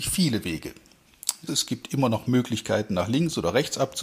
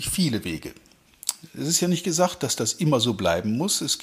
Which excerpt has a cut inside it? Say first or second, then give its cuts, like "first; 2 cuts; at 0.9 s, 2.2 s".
first; 1 cut; at 1.5 s